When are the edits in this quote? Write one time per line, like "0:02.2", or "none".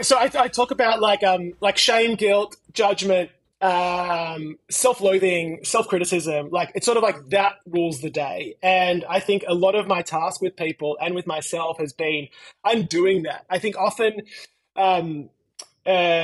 none